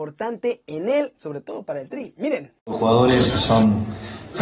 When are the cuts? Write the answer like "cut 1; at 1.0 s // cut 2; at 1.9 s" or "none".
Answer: cut 1; at 1.1 s